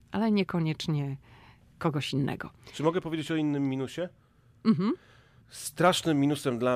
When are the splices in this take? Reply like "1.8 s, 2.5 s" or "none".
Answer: none